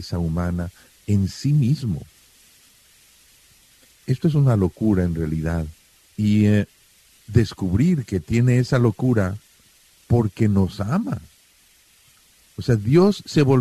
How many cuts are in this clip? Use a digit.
1